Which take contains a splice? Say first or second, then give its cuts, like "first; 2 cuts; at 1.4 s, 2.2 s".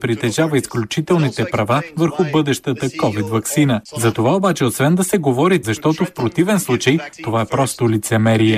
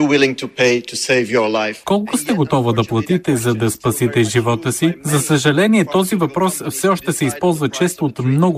first; 1 cut; at 5.6 s